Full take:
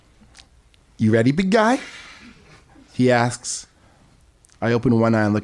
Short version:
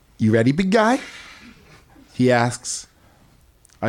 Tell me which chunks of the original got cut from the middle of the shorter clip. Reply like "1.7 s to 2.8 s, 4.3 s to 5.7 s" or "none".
none